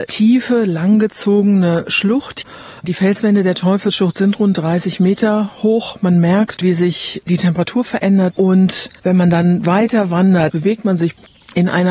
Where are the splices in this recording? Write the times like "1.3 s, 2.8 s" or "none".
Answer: 6.6 s, 8.3 s, 10.5 s